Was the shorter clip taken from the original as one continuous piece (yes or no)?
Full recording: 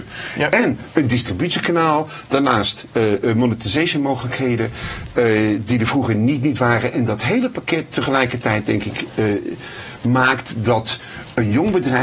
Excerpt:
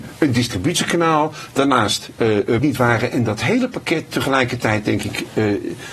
no